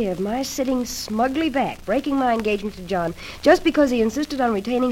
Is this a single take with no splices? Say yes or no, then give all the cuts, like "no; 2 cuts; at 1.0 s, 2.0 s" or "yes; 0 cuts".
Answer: yes; 0 cuts